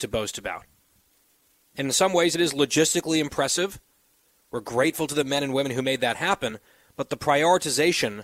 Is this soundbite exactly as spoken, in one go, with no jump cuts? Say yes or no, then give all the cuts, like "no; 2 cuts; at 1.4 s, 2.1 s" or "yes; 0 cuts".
yes; 0 cuts